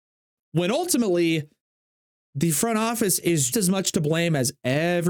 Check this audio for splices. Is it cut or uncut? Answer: cut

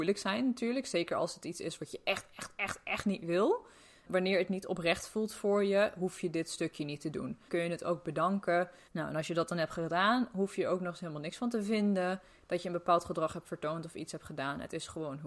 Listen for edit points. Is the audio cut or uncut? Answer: cut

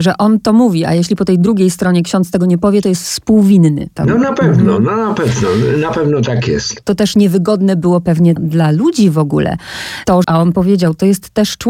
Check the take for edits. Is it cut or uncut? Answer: cut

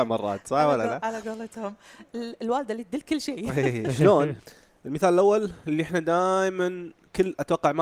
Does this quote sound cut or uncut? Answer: cut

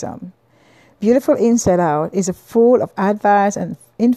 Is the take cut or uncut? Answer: uncut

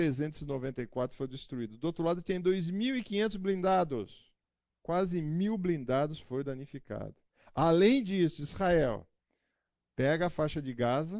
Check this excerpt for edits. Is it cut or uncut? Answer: uncut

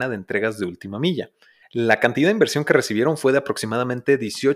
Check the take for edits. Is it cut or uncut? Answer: cut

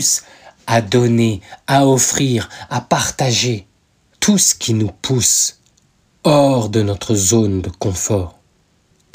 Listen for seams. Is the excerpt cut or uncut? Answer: cut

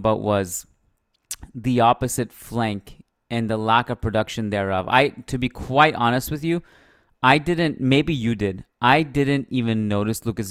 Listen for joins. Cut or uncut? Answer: uncut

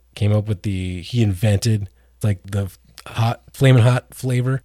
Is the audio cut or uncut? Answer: cut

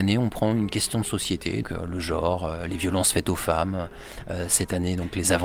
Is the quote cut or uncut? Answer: cut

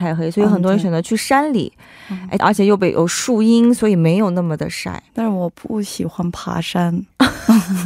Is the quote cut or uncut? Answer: cut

